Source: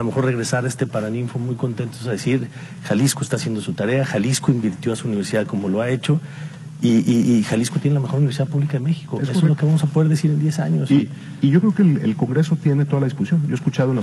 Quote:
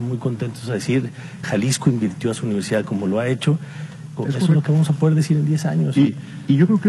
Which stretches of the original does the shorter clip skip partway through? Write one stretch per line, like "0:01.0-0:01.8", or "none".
0:02.8-0:04.0
0:06.8-0:09.1